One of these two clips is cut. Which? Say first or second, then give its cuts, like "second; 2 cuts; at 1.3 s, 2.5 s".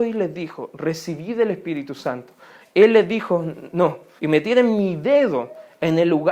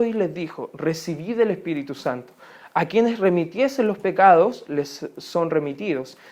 first; 2 cuts; at 2.6 s, 4.2 s